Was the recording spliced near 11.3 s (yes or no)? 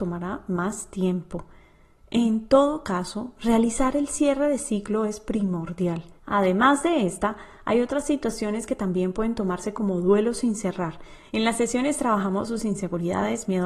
yes